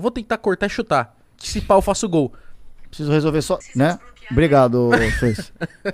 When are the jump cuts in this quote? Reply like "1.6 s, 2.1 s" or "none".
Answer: 3.6 s